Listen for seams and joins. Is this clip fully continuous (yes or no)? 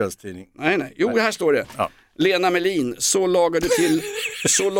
yes